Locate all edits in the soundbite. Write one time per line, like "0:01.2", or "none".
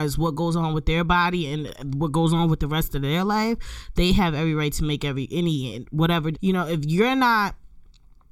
0:06.3